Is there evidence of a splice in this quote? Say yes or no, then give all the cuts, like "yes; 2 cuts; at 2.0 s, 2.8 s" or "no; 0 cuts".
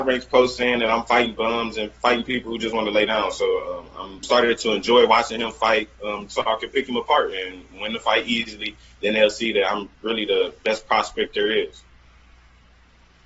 yes; 1 cut; at 4.2 s